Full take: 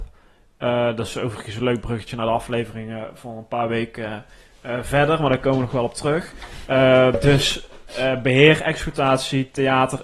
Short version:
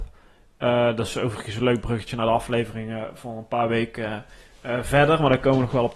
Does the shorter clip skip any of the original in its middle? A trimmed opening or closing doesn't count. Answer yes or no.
no